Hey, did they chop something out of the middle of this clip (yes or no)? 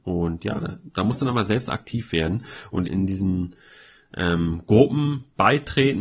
yes